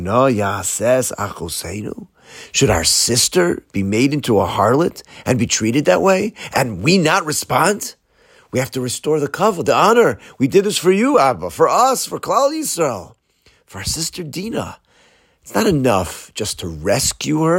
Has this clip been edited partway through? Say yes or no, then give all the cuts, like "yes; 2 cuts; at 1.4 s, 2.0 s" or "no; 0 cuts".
no; 0 cuts